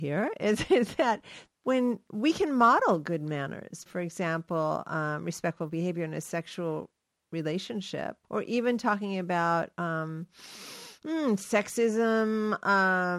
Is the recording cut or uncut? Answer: cut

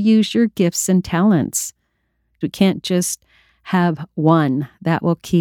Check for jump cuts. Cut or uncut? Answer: cut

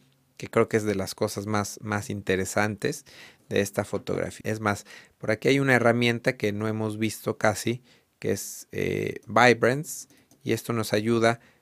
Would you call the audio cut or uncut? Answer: cut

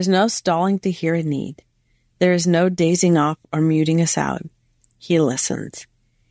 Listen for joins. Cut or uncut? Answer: cut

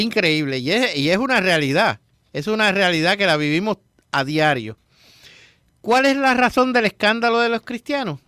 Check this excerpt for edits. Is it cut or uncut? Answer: uncut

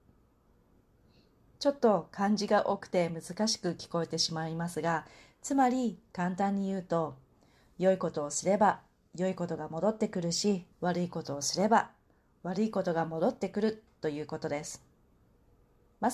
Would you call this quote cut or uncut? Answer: cut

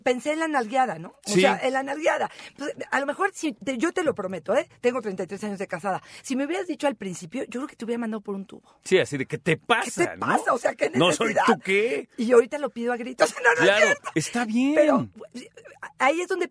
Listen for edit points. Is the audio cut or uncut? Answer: cut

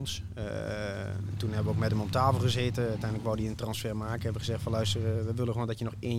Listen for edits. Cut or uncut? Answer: uncut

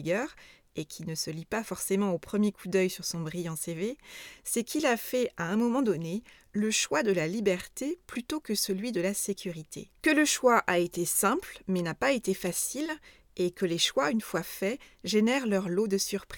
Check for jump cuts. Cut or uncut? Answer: cut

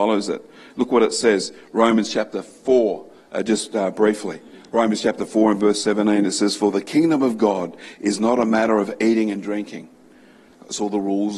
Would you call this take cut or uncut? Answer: uncut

